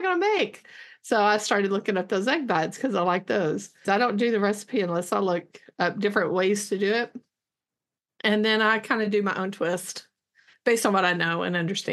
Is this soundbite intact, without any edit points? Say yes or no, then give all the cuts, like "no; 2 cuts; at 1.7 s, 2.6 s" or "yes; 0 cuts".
no; 1 cut; at 3.8 s